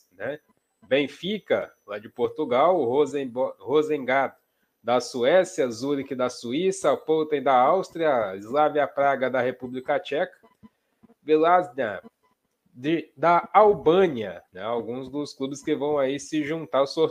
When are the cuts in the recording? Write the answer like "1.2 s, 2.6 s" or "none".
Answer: 14.5 s